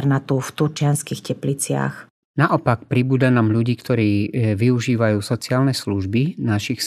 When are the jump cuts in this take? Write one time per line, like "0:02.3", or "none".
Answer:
0:02.2

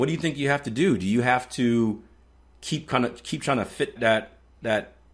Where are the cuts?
0:04.0

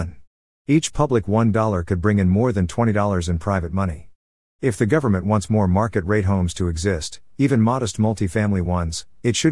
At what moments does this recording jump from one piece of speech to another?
0:04.5

